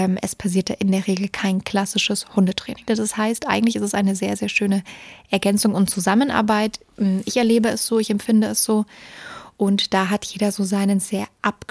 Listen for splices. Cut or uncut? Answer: cut